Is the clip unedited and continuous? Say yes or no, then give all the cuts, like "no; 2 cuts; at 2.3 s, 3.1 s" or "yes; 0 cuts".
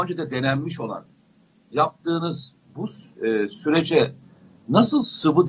yes; 0 cuts